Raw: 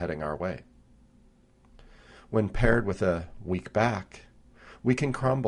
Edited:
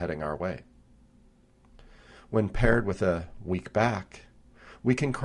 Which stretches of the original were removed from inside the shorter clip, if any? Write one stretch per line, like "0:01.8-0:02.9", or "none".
none